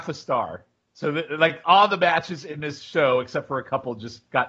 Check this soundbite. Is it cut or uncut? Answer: uncut